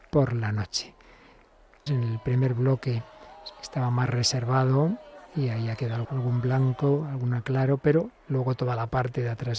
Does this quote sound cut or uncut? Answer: cut